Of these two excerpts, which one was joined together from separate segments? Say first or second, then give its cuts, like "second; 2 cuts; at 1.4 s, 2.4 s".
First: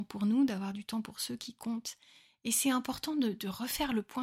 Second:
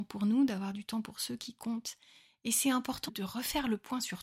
second; 1 cut; at 3.1 s